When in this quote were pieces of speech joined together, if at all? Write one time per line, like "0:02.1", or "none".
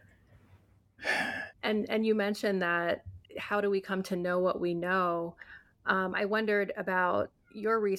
0:01.5
0:03.3